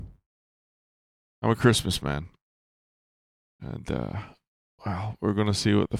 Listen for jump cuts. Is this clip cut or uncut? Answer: cut